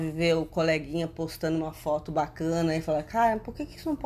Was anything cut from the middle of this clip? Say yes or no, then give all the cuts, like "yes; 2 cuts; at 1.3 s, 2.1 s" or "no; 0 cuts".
no; 0 cuts